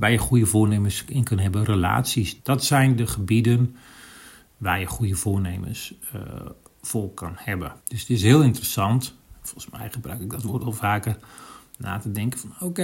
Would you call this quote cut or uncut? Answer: cut